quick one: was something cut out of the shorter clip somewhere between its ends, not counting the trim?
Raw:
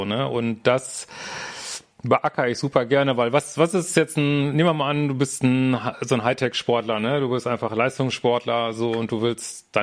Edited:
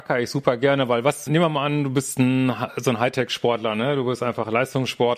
yes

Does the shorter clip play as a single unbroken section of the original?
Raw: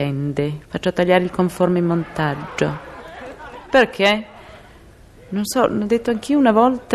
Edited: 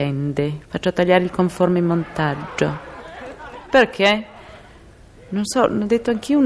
yes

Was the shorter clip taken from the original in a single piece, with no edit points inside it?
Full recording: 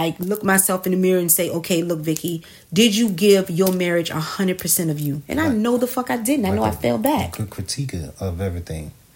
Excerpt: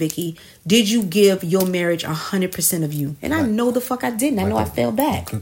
yes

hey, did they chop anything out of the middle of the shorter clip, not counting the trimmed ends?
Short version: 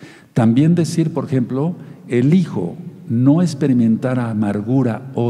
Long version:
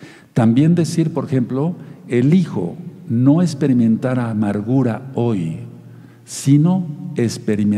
no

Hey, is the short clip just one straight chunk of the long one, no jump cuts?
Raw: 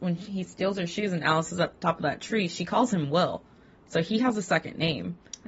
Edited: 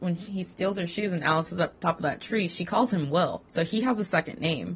no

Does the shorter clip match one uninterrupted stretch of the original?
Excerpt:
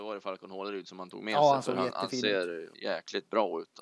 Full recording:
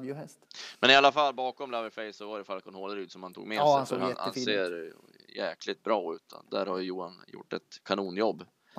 no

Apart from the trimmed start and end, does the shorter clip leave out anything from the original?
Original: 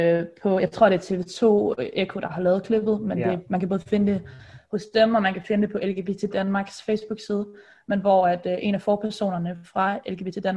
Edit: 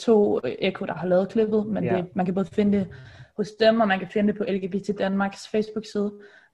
no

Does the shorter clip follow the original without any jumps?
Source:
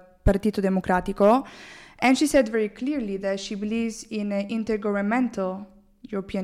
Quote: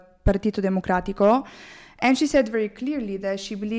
yes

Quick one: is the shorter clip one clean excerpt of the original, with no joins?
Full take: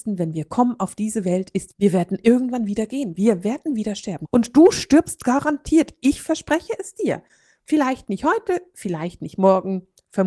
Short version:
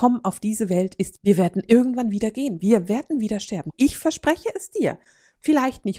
no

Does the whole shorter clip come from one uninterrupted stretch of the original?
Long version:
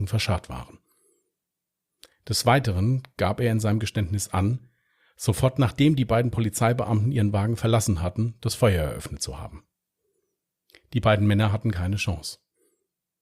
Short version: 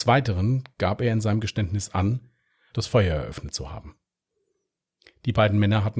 no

